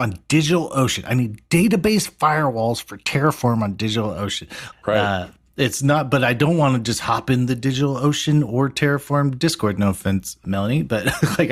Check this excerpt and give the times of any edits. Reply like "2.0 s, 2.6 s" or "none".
4.7 s, 10.4 s